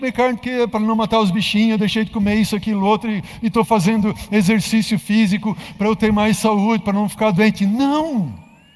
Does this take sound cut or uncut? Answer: uncut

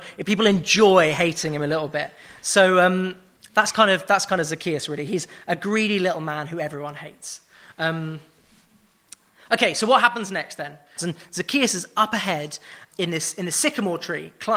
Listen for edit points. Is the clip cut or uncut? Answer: cut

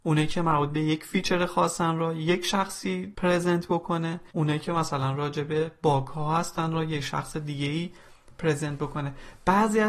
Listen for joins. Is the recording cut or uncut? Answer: cut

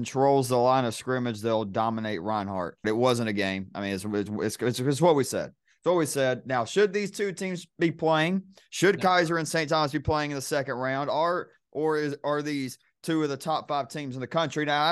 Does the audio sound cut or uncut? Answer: cut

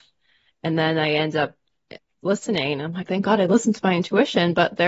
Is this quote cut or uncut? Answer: cut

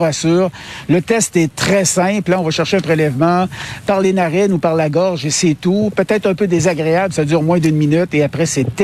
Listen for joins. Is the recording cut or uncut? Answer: uncut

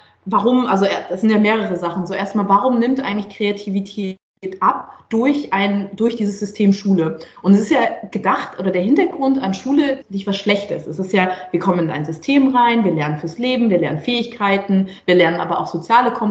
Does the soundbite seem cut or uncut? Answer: cut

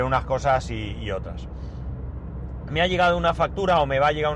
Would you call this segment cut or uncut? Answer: uncut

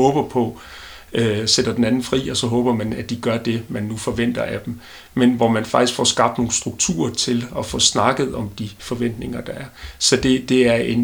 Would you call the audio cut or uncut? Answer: uncut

